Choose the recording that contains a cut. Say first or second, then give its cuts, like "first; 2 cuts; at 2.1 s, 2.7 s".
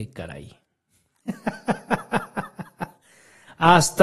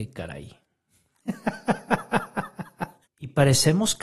second; 1 cut; at 3.0 s